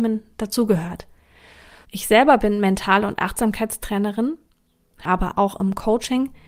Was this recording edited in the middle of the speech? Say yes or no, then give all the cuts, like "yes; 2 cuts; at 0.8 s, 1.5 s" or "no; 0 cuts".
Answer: yes; 2 cuts; at 1.8 s, 5.0 s